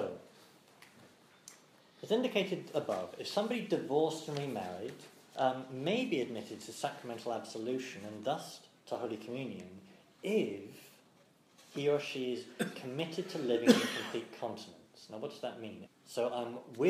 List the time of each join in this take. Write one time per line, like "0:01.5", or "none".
0:15.9